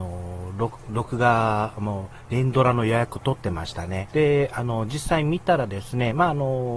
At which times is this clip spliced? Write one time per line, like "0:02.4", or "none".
0:04.1